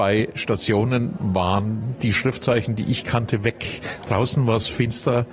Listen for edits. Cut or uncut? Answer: uncut